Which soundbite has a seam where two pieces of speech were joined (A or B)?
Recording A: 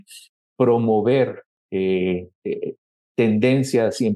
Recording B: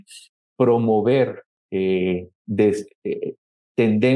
A